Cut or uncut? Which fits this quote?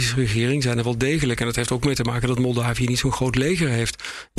uncut